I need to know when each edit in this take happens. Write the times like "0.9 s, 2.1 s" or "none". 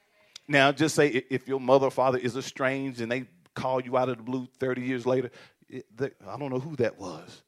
6.1 s